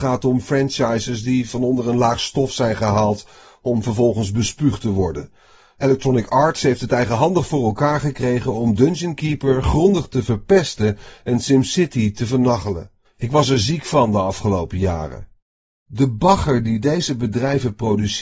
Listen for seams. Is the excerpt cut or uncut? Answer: cut